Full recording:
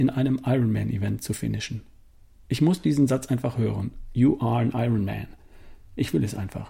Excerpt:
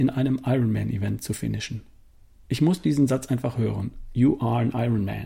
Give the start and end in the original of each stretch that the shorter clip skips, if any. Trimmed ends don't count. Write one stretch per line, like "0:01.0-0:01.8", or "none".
none